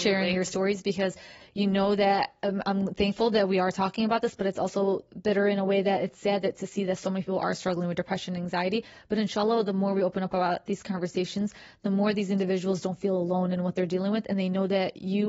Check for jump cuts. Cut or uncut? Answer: uncut